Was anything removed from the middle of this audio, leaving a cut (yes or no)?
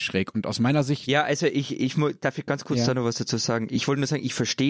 no